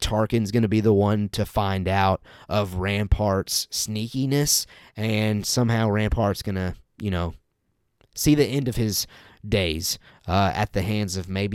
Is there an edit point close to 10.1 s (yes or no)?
no